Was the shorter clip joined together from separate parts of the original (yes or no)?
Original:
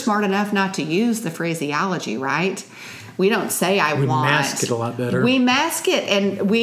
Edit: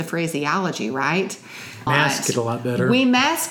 yes